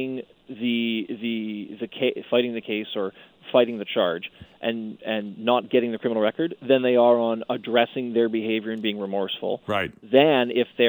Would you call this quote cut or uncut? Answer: uncut